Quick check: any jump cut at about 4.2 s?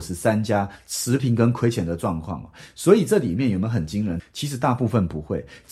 yes; 1 cut; at 4.2 s

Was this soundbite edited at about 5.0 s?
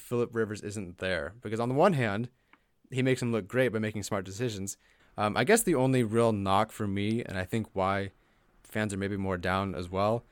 yes; 1 cut; at 5.0 s

